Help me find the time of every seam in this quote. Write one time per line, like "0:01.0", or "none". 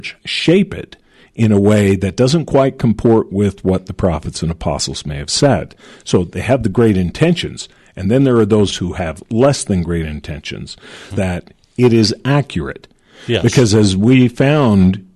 0:08.7
0:11.1